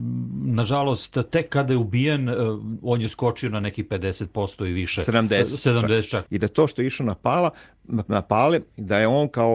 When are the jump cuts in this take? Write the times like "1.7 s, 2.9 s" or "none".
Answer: 6.3 s